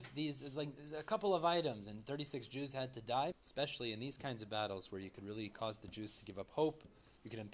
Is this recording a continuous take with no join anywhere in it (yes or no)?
no